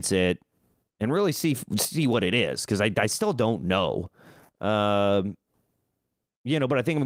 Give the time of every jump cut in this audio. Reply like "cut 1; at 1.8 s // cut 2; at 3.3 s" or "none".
none